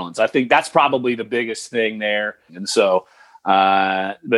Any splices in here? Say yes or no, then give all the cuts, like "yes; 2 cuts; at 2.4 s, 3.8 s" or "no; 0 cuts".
yes; 1 cut; at 2.5 s